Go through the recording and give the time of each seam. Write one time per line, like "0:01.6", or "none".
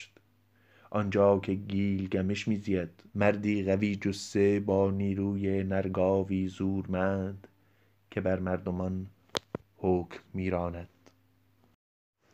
0:03.1